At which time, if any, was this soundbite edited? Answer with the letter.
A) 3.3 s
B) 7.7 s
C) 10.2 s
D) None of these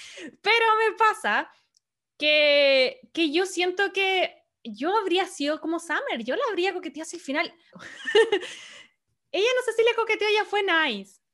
B